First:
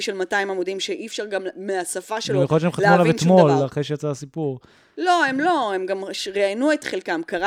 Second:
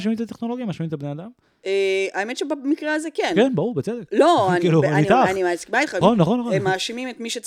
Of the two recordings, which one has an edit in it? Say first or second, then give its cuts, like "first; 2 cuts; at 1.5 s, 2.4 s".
second; 1 cut; at 6.0 s